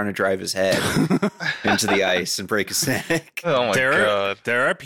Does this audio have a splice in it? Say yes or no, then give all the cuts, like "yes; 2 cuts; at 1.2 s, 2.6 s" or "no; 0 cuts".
no; 0 cuts